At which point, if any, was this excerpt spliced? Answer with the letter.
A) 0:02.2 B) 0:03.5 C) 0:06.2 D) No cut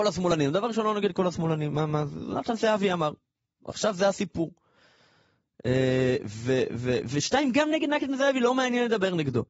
B